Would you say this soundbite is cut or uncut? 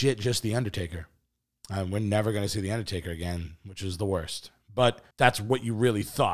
cut